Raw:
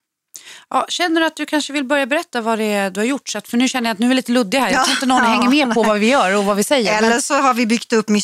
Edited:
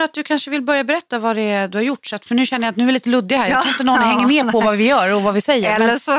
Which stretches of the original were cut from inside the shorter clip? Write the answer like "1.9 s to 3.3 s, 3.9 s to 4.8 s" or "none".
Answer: none